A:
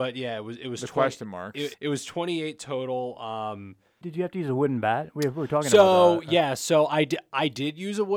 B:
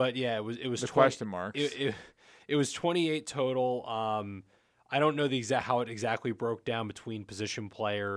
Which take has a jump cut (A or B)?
A